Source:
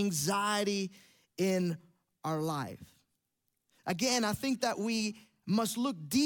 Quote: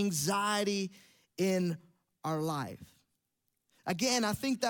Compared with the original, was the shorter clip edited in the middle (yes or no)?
no